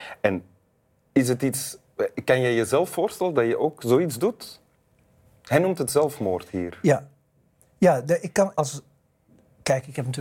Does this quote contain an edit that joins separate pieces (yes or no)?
yes